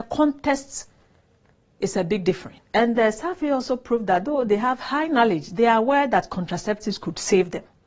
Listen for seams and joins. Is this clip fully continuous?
no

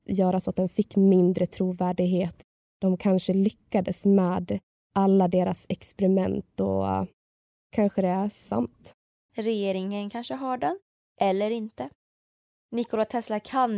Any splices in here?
yes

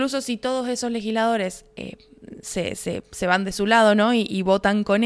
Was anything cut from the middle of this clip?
no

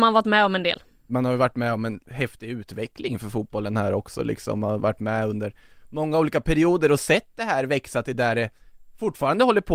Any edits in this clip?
yes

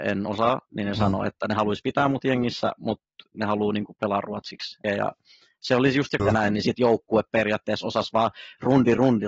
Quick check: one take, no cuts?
no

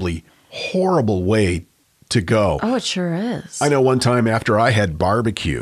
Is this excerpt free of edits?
yes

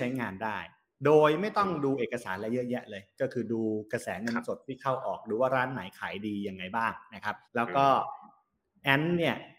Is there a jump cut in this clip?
yes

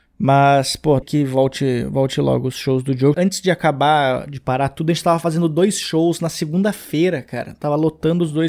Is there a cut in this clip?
yes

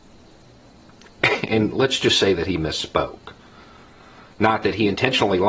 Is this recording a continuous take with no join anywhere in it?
yes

